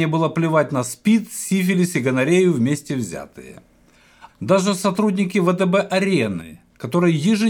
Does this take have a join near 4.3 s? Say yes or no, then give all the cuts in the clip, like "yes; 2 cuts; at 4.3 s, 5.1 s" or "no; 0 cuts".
yes; 1 cut; at 4.3 s